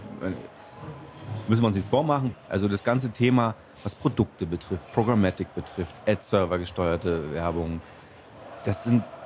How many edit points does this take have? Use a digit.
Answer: 1